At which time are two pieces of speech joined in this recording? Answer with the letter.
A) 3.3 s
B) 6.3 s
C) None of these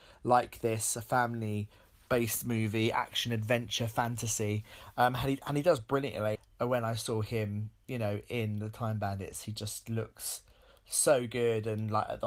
B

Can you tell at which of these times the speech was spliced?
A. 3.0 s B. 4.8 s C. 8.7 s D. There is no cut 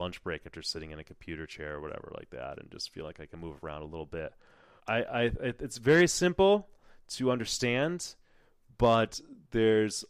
B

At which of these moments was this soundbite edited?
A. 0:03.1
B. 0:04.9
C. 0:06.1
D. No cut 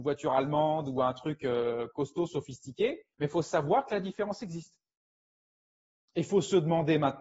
A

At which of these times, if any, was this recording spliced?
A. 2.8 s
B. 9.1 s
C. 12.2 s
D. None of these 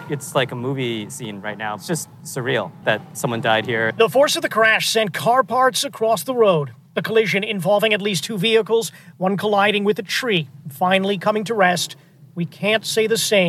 A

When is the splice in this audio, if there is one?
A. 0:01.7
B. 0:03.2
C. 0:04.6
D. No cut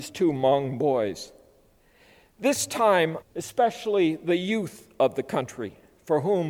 B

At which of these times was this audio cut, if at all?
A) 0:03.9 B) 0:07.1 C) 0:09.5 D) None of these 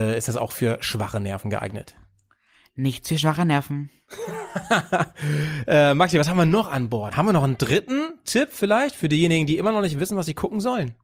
B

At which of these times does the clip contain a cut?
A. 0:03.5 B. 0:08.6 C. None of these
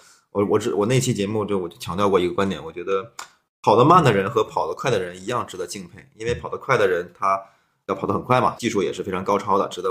B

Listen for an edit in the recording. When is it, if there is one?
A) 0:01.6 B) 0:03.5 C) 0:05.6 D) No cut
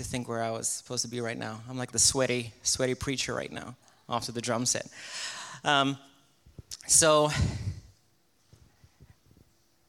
D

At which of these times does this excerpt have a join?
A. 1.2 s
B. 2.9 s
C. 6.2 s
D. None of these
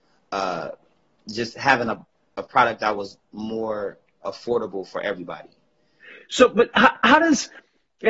D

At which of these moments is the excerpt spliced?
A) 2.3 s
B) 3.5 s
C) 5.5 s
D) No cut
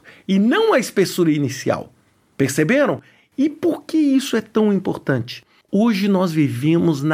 D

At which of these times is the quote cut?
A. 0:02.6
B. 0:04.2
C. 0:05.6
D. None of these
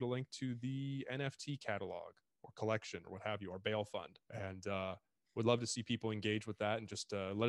B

